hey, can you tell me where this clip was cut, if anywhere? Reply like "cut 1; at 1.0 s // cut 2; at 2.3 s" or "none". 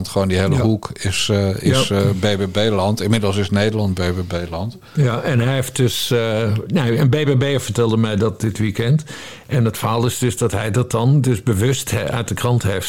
none